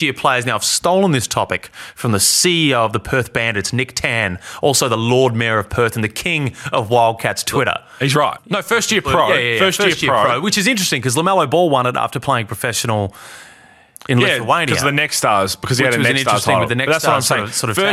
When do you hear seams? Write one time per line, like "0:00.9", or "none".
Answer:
0:08.4